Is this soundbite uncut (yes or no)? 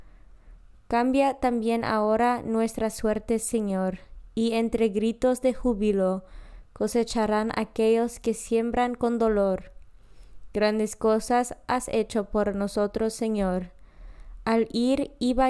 yes